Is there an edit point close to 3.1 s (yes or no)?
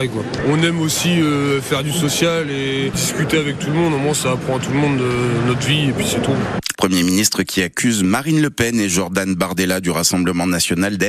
no